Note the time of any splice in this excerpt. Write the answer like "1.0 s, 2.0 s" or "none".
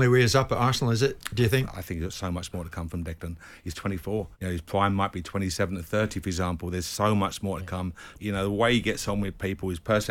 4.3 s, 8.2 s